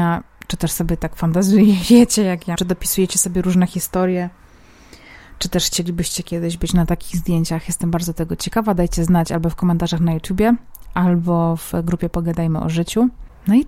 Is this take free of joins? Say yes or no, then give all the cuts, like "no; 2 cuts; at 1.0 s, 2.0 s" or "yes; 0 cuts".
no; 1 cut; at 2.6 s